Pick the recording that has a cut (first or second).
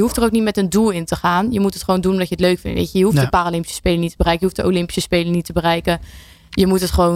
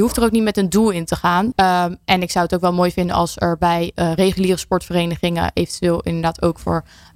second